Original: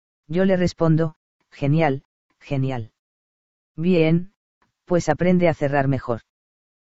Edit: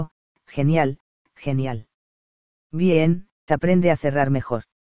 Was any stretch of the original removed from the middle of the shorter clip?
yes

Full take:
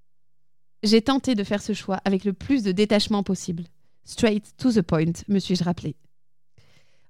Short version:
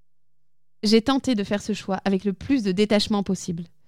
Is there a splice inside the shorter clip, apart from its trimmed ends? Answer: no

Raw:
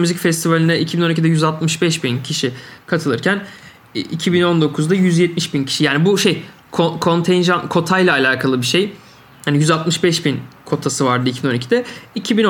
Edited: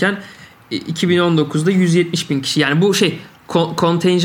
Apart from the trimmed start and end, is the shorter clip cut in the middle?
no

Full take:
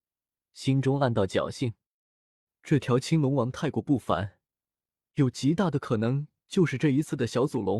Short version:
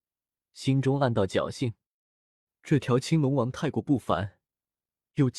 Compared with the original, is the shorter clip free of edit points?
yes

